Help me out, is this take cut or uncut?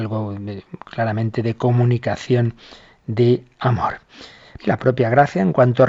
cut